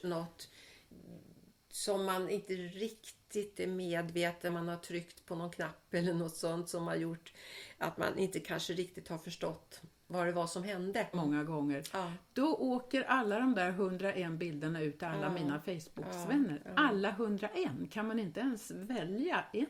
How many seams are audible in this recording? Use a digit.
2